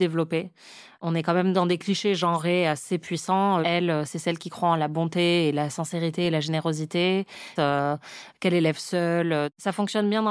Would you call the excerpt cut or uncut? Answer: cut